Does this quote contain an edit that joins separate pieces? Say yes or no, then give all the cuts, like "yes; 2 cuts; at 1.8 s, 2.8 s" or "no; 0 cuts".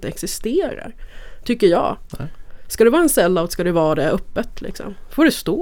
no; 0 cuts